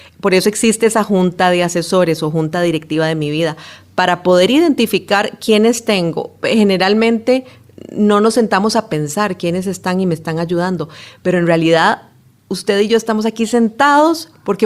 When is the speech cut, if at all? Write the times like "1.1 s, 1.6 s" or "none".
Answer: none